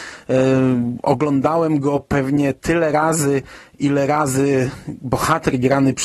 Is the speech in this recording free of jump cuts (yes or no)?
yes